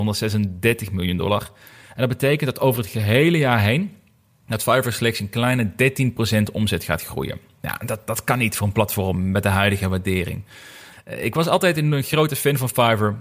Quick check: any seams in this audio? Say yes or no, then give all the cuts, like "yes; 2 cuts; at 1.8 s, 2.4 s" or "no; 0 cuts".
yes; 1 cut; at 10.9 s